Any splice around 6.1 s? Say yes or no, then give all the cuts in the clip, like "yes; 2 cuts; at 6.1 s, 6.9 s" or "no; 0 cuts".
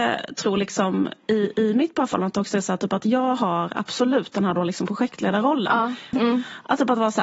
yes; 1 cut; at 6.1 s